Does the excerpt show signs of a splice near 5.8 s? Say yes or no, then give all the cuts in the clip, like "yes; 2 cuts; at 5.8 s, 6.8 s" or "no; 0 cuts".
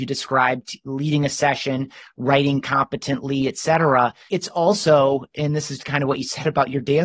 yes; 2 cuts; at 4.3 s, 5.8 s